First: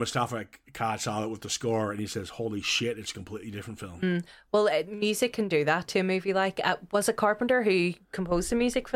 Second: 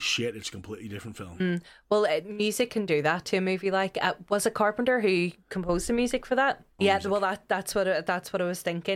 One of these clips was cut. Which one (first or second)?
second